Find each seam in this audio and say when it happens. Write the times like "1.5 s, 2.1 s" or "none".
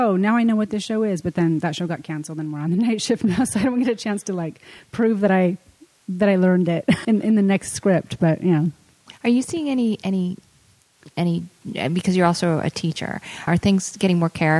7.0 s, 13.5 s